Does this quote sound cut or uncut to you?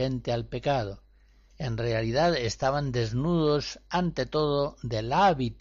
cut